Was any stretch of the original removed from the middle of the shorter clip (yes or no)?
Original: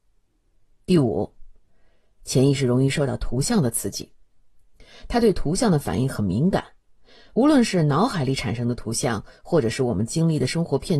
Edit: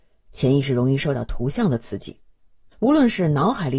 yes